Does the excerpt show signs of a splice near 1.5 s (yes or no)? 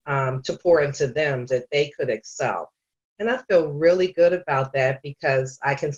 yes